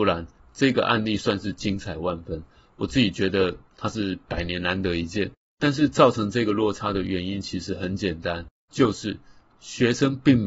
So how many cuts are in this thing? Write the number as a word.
zero